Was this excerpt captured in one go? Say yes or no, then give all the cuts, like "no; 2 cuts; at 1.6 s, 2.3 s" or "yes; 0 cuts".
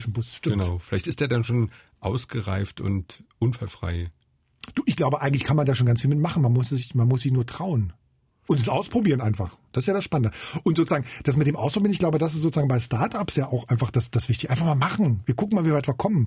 yes; 0 cuts